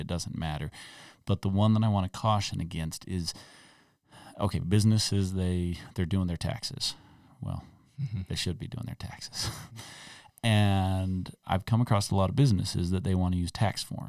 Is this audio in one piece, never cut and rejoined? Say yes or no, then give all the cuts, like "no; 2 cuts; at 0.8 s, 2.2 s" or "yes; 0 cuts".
yes; 0 cuts